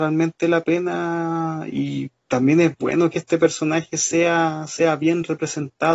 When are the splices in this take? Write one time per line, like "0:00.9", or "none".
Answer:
none